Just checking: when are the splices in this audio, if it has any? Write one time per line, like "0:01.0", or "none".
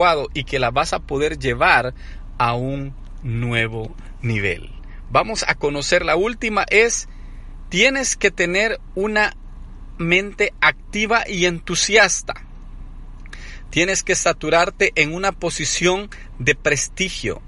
none